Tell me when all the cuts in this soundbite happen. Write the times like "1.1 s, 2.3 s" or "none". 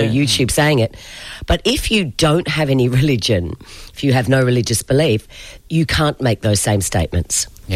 3.9 s, 5.6 s